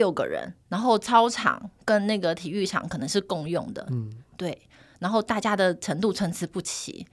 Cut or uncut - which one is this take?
uncut